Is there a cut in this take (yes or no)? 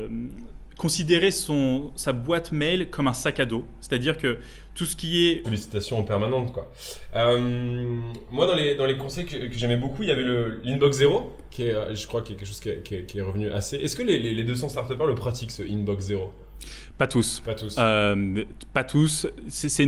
yes